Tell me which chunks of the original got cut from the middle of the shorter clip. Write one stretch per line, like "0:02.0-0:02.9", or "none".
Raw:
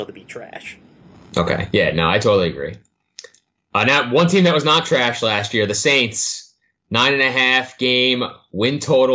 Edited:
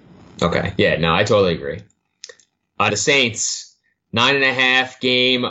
0:03.8-0:05.7